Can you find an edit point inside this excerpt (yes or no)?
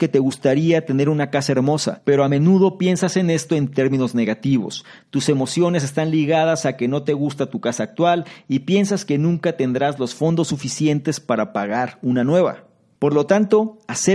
yes